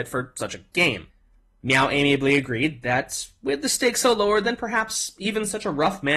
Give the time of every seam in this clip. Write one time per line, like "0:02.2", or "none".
none

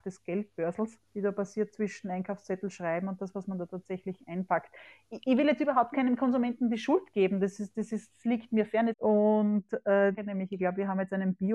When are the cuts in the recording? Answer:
0:01.1
0:08.9
0:10.2

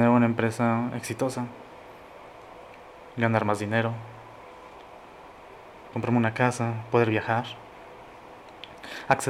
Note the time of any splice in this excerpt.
0:05.9

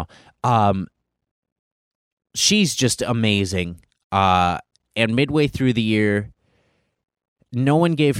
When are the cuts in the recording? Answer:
none

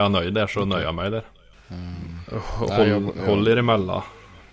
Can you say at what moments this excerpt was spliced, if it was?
0:01.5

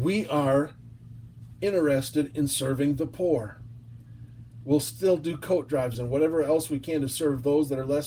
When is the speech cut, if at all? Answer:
0:05.9

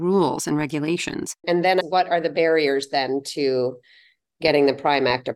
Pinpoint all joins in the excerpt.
0:01.4

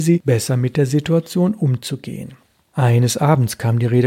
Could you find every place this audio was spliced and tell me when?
none

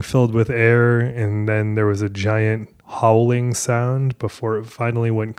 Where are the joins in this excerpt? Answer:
none

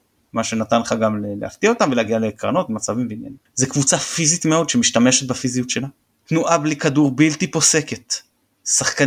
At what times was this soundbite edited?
0:03.5
0:06.1

